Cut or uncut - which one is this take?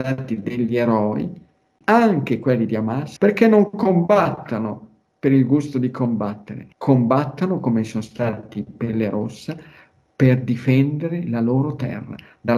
cut